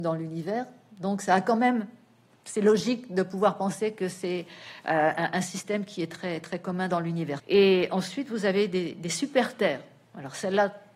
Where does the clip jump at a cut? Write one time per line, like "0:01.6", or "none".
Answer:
0:07.4